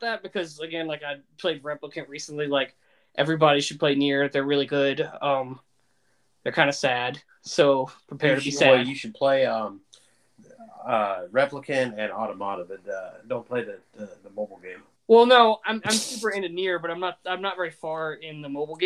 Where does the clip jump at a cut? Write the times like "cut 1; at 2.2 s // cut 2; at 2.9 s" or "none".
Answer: cut 1; at 14.9 s